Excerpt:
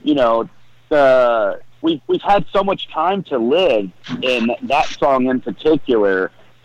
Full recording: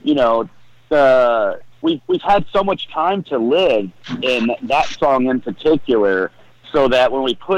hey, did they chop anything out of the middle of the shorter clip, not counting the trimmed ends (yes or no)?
no